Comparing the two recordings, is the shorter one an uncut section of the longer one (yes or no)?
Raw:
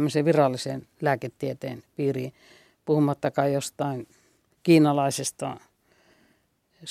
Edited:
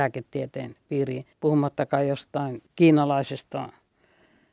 no